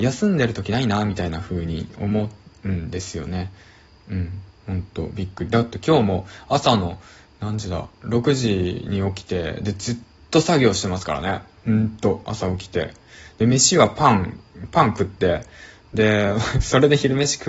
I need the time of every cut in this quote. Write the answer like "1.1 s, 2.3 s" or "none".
none